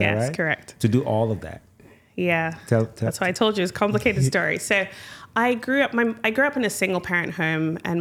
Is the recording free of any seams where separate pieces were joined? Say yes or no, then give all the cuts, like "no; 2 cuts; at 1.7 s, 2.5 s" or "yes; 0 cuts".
yes; 0 cuts